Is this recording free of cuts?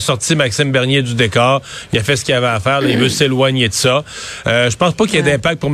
yes; 0 cuts

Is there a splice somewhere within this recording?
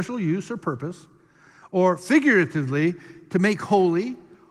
no; 0 cuts

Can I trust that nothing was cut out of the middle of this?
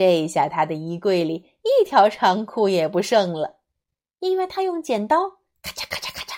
yes; 0 cuts

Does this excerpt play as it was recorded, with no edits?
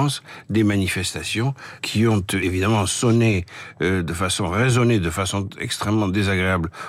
no; 1 cut; at 1.8 s

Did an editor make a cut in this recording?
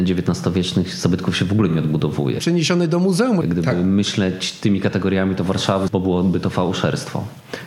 yes; 3 cuts; at 2.4 s, 3.4 s, 5.9 s

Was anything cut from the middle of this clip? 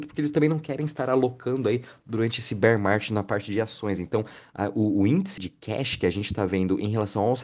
yes; 1 cut; at 5.4 s

